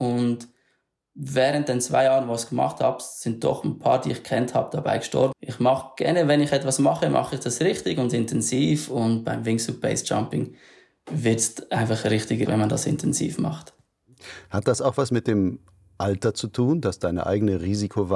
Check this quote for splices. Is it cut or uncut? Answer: cut